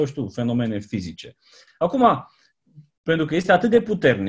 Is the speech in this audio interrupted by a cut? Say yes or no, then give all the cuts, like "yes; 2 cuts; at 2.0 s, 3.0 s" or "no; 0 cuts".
yes; 2 cuts; at 1.7 s, 2.9 s